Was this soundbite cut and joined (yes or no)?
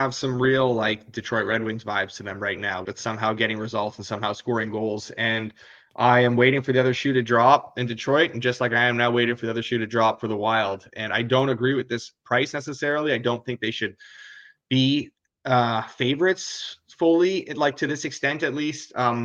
yes